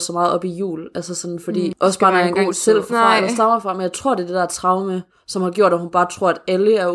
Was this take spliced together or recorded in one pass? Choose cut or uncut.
cut